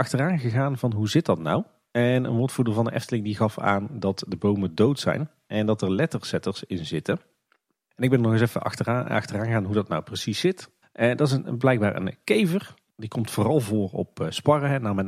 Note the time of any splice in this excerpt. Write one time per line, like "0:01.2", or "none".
0:10.8